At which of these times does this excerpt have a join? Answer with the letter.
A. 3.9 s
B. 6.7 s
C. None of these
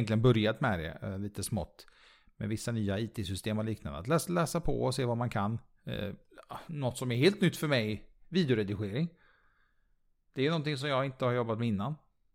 C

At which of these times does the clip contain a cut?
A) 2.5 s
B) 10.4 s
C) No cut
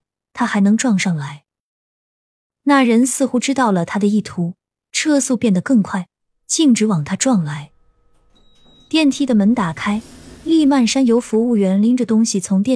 A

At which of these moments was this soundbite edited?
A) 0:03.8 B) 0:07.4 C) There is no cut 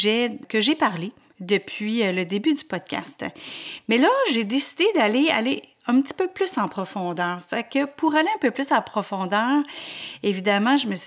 C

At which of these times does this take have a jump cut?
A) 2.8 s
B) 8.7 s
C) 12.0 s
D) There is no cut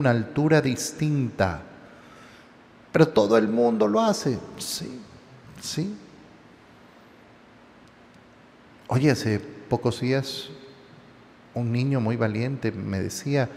A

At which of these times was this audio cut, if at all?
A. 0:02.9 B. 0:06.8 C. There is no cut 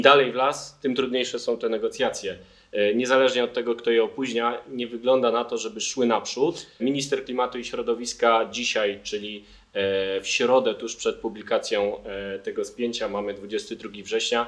B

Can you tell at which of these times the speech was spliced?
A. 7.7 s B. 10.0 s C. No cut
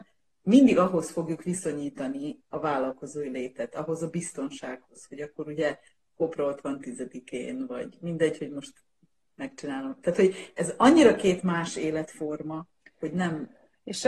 C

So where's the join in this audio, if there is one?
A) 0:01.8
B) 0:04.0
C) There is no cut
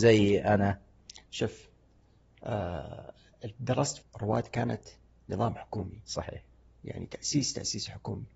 B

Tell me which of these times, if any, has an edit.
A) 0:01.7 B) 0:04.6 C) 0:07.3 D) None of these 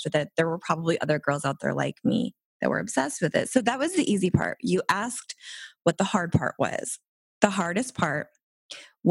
D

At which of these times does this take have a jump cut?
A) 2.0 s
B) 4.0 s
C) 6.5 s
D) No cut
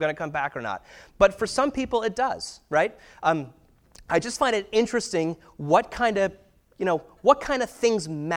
D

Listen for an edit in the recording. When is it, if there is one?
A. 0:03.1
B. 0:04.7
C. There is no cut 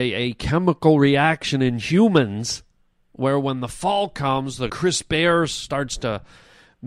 B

